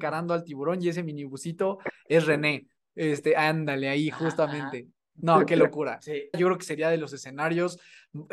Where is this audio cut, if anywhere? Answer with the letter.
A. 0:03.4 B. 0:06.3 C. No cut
B